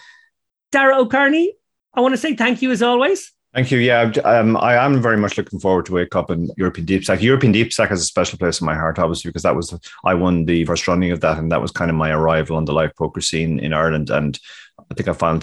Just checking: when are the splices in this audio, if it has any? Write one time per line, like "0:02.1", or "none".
0:10.7